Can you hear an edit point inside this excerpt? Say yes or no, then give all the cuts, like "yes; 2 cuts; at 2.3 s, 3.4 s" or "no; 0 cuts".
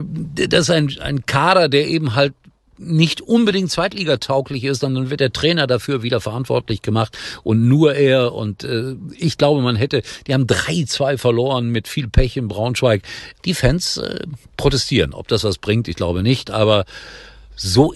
yes; 1 cut; at 13.4 s